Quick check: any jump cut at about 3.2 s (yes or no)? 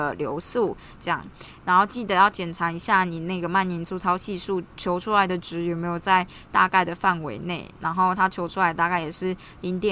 no